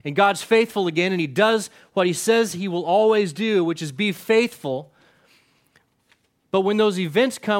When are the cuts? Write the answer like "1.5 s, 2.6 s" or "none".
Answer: none